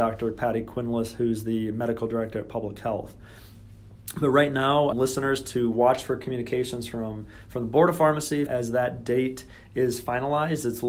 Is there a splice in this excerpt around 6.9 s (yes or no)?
no